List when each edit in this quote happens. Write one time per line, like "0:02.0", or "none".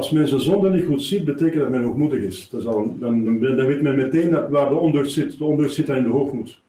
none